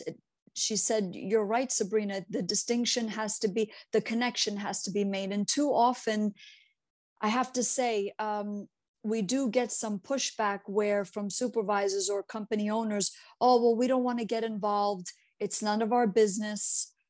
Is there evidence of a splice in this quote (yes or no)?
no